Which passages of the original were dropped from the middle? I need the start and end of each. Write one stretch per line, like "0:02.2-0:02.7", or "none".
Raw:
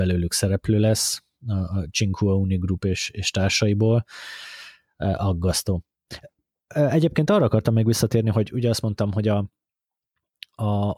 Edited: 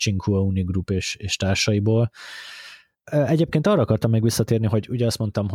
0:04.9-0:06.5